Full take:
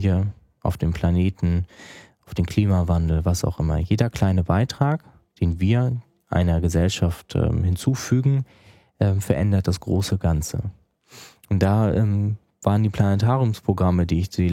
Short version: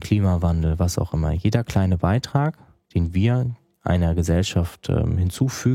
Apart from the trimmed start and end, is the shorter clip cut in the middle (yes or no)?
no